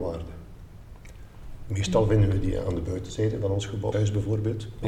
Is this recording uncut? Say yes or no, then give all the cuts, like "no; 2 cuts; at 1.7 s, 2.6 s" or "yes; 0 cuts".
no; 1 cut; at 3.9 s